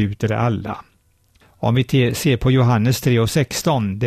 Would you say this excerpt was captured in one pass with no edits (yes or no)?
no